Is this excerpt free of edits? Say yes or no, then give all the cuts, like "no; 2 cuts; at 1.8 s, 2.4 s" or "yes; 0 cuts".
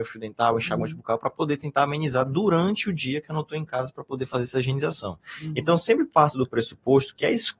yes; 0 cuts